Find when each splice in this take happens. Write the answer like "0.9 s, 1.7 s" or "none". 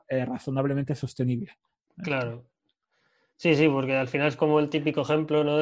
none